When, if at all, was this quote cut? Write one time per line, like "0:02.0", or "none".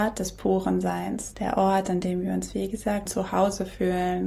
0:01.3
0:03.1